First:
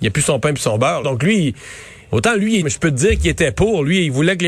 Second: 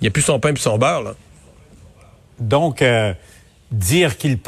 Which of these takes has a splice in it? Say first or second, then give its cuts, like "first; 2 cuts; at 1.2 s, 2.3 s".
first; 2 cuts; at 1.0 s, 2.6 s